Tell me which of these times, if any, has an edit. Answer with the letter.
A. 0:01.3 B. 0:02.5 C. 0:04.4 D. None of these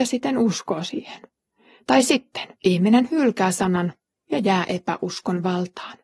B